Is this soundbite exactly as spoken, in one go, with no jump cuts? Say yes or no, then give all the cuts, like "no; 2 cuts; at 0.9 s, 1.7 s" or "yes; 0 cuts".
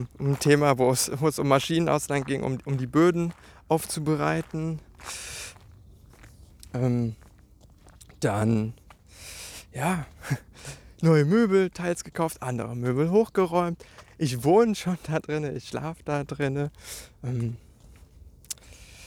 yes; 0 cuts